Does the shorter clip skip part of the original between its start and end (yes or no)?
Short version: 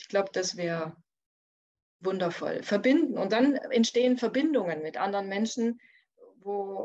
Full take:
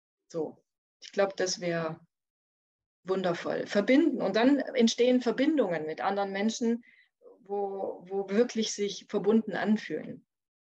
no